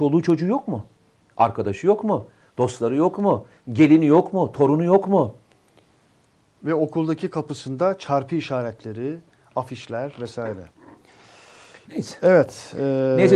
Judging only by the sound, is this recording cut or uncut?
uncut